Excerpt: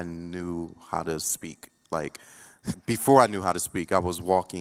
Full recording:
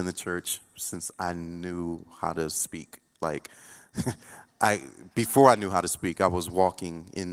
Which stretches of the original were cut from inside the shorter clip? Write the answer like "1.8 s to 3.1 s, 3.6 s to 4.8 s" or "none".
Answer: 4.0 s to 5.0 s